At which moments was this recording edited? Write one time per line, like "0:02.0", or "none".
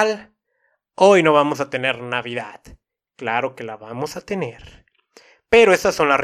none